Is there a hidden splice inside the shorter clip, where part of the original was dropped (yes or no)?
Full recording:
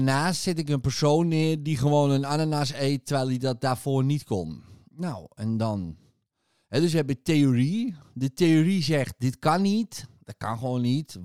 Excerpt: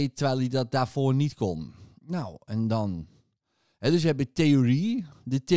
no